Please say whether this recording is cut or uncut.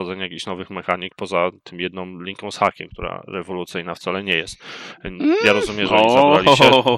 uncut